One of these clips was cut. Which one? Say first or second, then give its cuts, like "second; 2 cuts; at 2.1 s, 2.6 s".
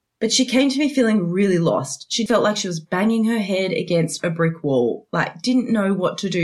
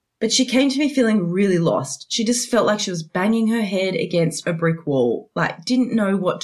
first; 1 cut; at 2.3 s